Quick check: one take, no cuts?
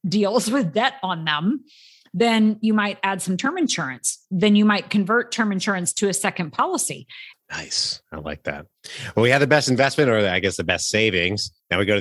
no; 1 cut; at 7.3 s

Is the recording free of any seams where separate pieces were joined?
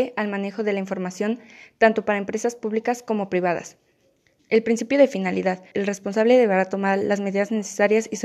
no; 2 cuts; at 4.4 s, 5.7 s

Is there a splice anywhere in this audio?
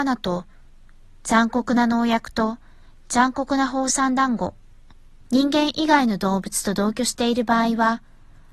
yes; 1 cut; at 5.2 s

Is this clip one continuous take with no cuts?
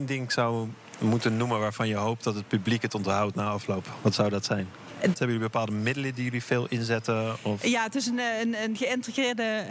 no; 1 cut; at 5.1 s

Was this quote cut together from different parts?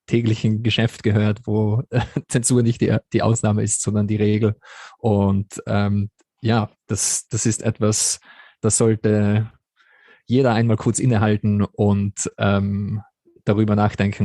no; 0 cuts

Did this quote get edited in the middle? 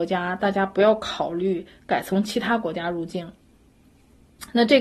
no; 0 cuts

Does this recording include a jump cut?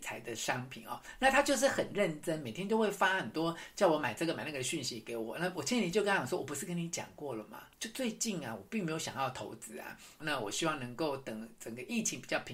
yes; 2 cuts; at 7.7 s, 10.2 s

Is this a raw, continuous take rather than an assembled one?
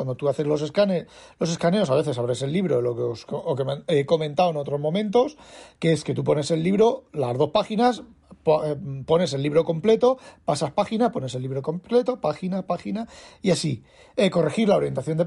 no; 1 cut; at 12.7 s

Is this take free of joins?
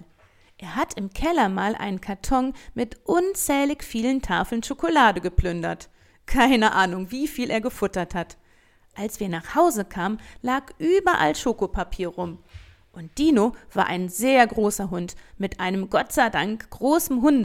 yes; 0 cuts

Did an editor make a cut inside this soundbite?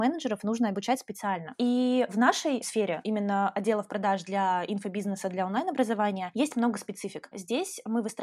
no; 0 cuts

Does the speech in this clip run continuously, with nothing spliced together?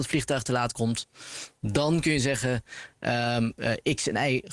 yes; 0 cuts

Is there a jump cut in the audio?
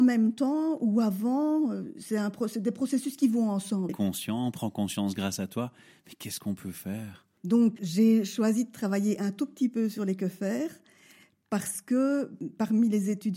yes; 2 cuts; at 3.9 s, 7.8 s

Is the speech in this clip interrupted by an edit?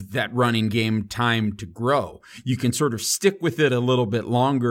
no; 0 cuts

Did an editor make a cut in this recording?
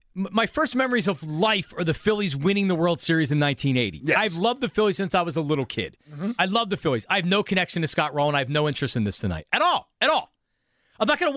no; 0 cuts

